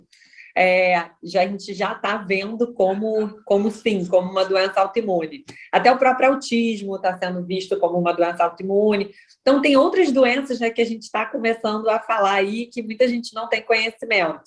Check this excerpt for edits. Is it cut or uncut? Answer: uncut